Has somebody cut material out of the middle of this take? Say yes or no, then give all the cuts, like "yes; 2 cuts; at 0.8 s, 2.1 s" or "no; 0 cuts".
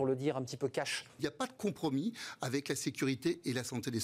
yes; 1 cut; at 1.2 s